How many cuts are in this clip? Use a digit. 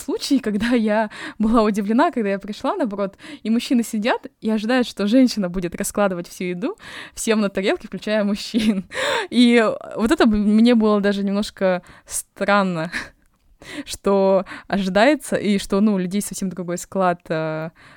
0